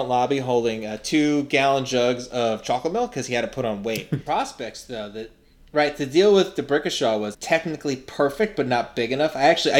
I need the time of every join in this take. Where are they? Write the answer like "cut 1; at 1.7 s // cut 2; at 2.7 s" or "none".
cut 1; at 4.3 s // cut 2; at 7.3 s